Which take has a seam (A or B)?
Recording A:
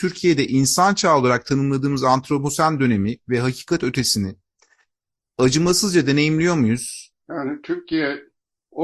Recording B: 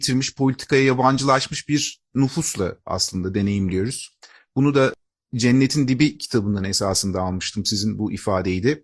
A